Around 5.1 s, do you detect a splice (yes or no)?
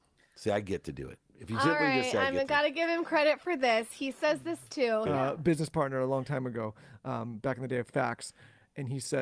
yes